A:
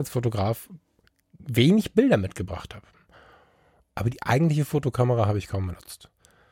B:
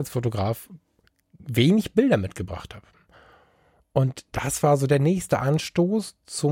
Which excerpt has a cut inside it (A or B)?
A